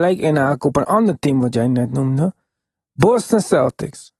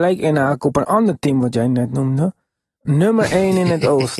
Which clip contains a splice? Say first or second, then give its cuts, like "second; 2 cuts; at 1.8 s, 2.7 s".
second; 1 cut; at 2.8 s